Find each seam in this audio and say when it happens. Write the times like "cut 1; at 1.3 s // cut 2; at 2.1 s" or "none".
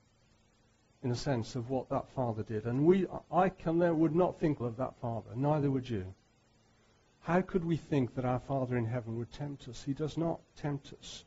cut 1; at 4.6 s